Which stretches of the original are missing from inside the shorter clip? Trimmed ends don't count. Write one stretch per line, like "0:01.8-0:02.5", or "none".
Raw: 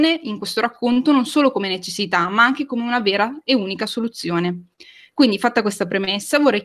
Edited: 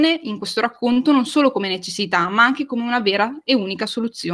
none